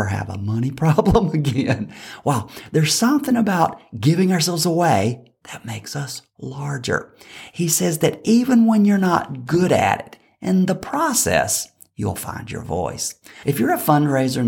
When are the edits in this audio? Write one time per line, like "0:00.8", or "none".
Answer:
0:13.4